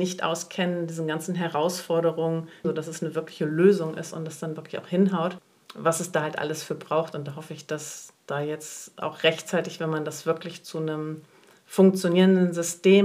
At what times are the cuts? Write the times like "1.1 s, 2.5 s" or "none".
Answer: 2.6 s